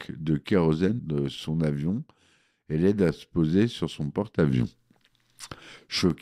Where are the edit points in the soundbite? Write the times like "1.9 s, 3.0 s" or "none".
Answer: 1.0 s

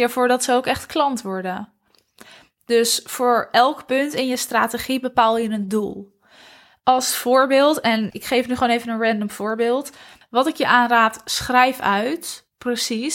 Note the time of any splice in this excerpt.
8.1 s, 10.2 s

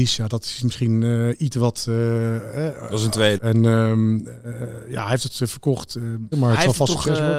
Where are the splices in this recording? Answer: 3.4 s, 6.3 s

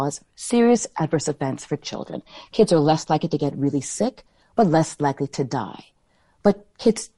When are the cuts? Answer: none

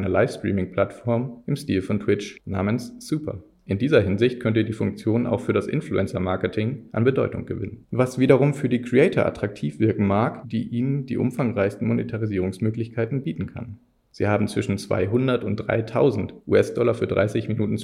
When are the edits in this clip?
3.5 s, 10.4 s, 14.1 s

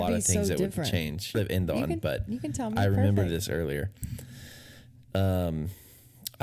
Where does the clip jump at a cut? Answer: 1.3 s

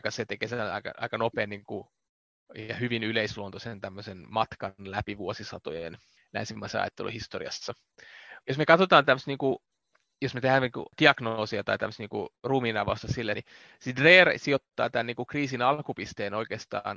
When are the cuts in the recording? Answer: 8.4 s, 10.9 s, 13.3 s

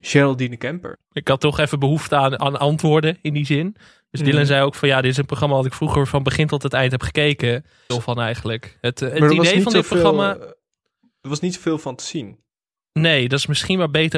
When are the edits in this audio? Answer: 1.1 s, 7.9 s

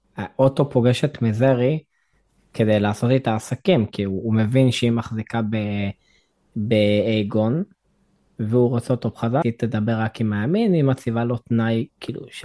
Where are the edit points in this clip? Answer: 9.4 s

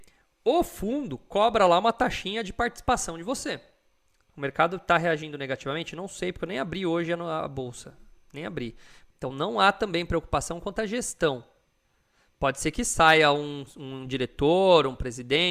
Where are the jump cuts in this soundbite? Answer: 4.3 s, 9.1 s

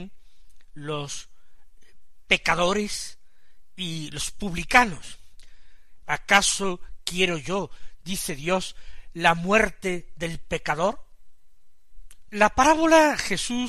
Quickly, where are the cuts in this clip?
6.0 s, 12.3 s

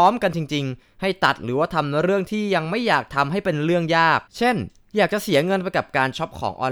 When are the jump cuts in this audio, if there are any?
4.3 s

